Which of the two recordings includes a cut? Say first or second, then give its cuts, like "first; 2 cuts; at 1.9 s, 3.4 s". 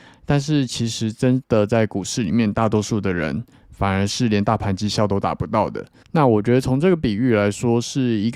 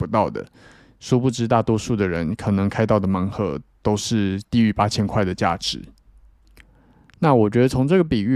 first; 1 cut; at 6.0 s